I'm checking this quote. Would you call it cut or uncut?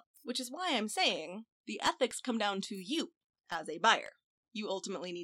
uncut